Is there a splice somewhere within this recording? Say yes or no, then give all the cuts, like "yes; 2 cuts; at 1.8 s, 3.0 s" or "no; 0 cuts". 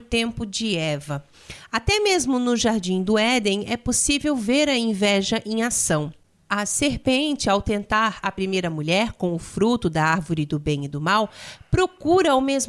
no; 0 cuts